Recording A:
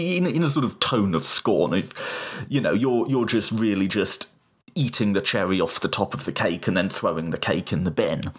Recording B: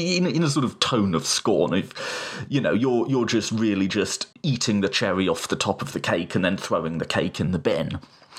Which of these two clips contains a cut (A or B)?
B